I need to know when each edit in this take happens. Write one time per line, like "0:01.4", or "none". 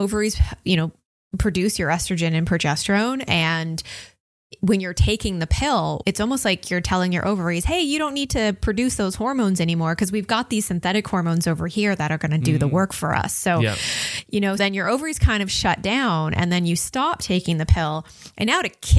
0:06.0
0:14.6

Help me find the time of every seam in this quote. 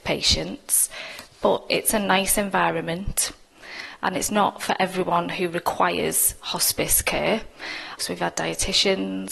0:08.0

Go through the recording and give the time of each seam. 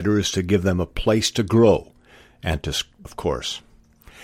0:03.0

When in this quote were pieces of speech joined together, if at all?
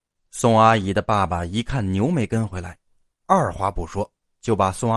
none

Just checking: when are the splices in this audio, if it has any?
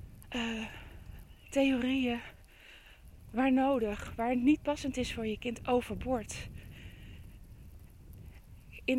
none

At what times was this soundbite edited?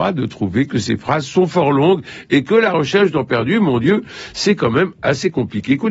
none

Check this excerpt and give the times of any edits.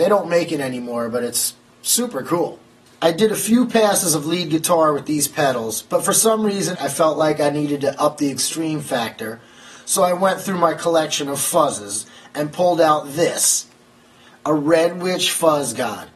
0:06.7

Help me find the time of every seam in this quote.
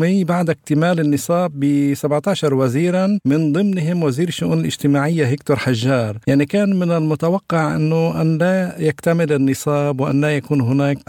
0:06.2

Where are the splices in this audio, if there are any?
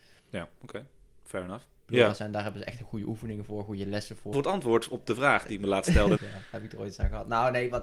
0:01.8
0:04.3
0:06.2

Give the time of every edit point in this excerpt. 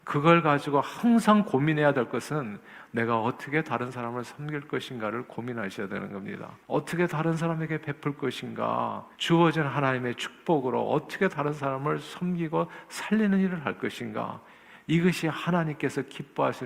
0:06.6
0:09.1

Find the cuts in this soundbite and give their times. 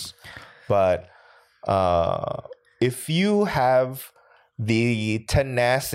none

